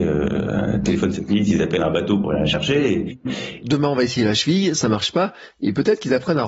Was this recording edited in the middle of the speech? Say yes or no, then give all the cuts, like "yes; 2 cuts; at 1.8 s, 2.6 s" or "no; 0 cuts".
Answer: yes; 1 cut; at 3.6 s